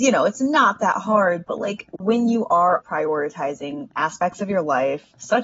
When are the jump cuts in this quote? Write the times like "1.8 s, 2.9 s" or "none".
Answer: 2.8 s